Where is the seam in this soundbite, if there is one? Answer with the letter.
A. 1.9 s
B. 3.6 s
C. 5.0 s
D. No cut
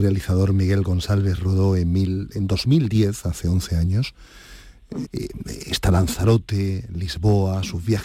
C